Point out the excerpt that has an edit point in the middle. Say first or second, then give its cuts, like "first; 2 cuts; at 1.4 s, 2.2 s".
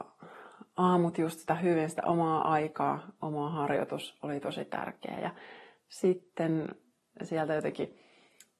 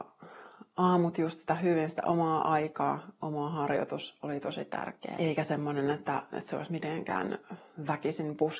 second; 2 cuts; at 5.2 s, 6.3 s